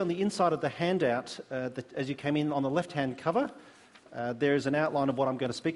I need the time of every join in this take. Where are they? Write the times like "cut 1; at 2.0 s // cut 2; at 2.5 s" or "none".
none